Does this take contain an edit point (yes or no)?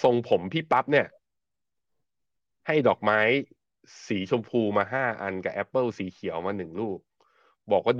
no